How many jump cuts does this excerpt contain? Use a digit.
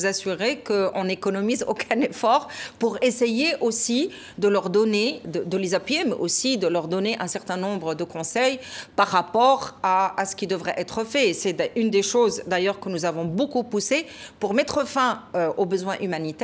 1